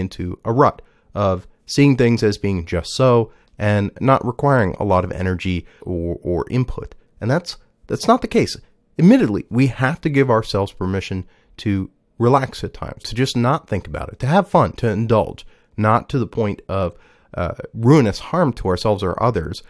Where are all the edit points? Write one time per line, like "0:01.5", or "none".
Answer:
0:05.8
0:13.0